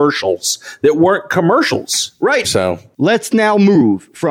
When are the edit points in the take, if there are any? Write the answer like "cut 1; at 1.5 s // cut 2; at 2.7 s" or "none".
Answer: cut 1; at 2.4 s